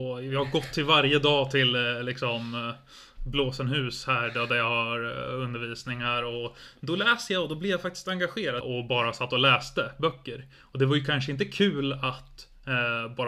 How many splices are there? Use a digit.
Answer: 1